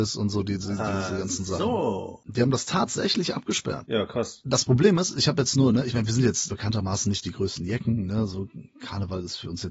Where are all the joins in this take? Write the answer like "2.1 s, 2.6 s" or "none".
none